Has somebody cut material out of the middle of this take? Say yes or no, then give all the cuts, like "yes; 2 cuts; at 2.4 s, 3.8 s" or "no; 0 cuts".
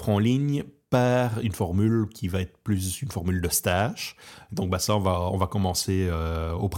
yes; 1 cut; at 4.5 s